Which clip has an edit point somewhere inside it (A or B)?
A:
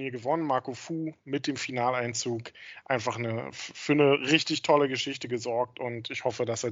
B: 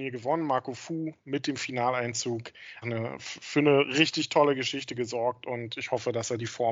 B